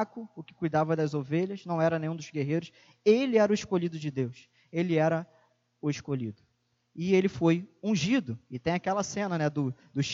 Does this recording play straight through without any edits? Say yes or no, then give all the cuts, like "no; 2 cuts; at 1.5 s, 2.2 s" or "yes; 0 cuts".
yes; 0 cuts